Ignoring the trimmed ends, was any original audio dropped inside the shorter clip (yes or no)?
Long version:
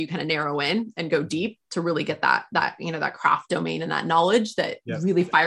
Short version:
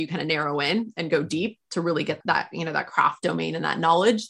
yes